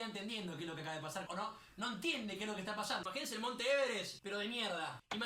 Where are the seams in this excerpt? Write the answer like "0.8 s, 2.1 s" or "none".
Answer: 1.3 s, 3.0 s, 4.2 s